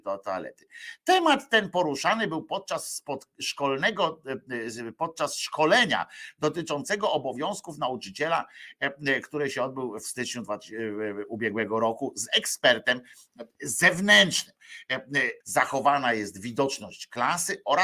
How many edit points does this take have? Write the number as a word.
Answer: one